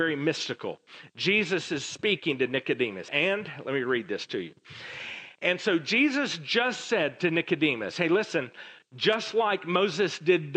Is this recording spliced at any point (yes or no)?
yes